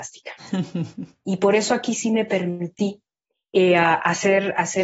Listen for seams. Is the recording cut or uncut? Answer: uncut